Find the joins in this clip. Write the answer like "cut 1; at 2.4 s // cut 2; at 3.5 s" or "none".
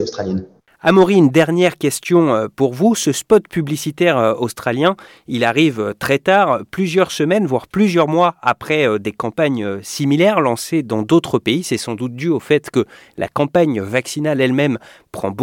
none